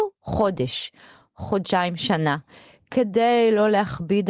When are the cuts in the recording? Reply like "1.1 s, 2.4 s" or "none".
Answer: none